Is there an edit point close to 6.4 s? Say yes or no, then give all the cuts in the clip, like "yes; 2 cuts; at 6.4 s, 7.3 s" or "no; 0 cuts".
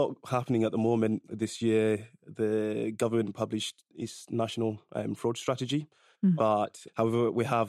yes; 1 cut; at 6.4 s